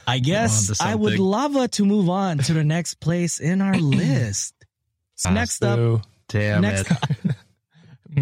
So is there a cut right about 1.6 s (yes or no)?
no